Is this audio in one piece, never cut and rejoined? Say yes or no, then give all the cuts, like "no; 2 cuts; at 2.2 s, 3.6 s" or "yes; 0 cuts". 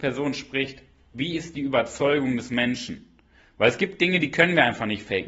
yes; 0 cuts